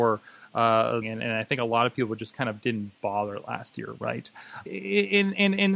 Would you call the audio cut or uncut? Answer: cut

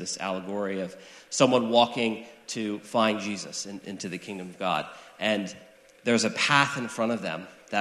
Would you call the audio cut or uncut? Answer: uncut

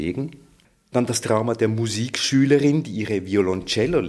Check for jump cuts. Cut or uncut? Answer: uncut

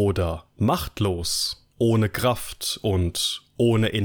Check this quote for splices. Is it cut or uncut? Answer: cut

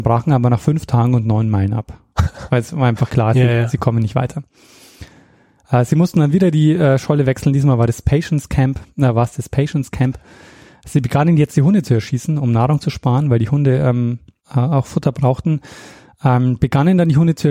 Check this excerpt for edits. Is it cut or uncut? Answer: uncut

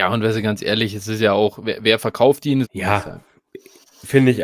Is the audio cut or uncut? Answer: cut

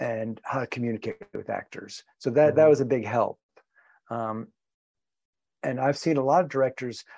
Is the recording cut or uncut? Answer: uncut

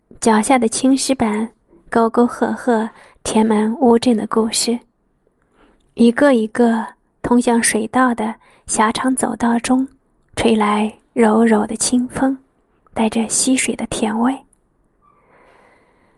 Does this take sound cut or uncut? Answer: uncut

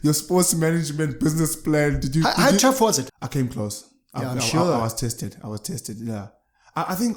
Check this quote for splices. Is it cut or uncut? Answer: cut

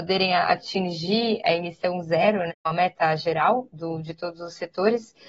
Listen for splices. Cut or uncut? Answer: cut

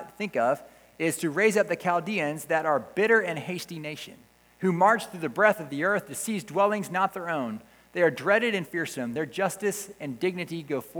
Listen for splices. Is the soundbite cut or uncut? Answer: uncut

